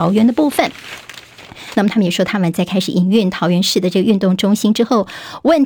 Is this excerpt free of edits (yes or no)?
no